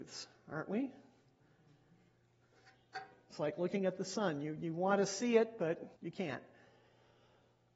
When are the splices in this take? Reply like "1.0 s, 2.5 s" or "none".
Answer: 6.0 s